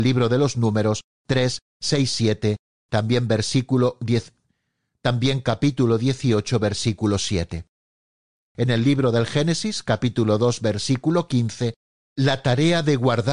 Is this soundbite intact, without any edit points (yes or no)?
no